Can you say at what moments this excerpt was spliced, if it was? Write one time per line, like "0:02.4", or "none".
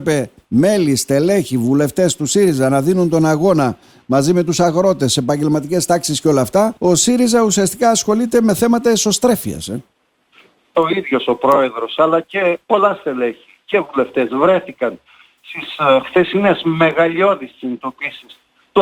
0:06.8
0:10.7
0:12.6